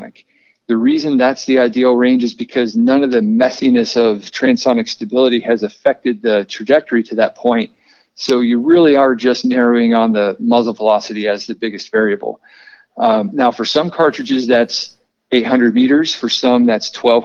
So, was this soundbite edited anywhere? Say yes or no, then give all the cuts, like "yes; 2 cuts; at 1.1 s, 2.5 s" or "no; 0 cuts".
no; 0 cuts